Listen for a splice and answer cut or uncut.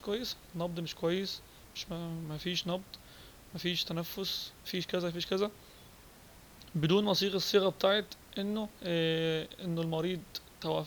cut